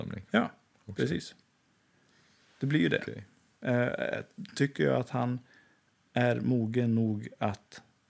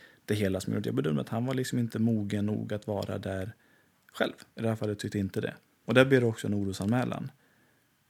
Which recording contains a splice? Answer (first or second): second